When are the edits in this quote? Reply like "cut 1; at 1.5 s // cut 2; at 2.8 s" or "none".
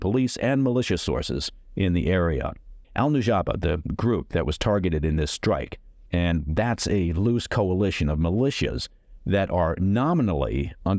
cut 1; at 2.8 s // cut 2; at 6.1 s